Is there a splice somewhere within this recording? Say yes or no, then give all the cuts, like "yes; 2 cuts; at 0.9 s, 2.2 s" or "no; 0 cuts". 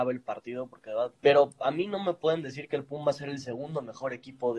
yes; 1 cut; at 1.2 s